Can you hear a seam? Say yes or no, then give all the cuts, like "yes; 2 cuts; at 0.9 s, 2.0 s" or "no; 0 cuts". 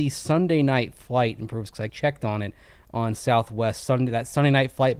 yes; 1 cut; at 1.9 s